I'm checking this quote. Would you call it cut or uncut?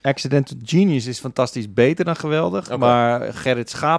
uncut